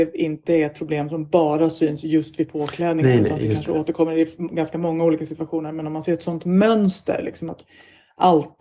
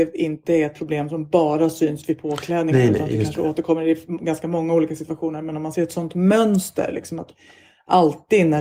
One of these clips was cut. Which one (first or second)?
second